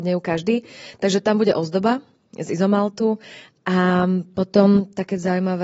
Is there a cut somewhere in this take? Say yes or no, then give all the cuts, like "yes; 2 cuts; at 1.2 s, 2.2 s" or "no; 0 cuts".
no; 0 cuts